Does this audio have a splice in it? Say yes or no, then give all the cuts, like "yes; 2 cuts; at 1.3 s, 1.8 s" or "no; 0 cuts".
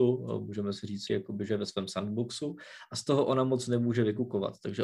yes; 1 cut; at 1.1 s